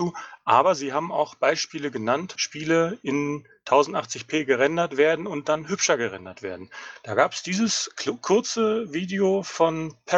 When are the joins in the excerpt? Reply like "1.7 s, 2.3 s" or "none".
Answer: 2.3 s